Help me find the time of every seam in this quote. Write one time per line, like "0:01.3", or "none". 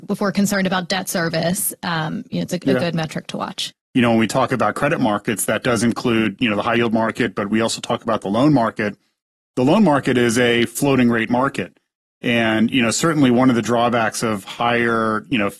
0:03.7